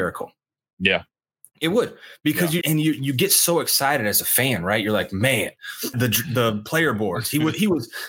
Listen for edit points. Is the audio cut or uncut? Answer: cut